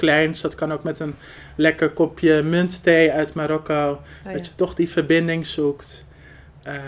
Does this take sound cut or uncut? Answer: uncut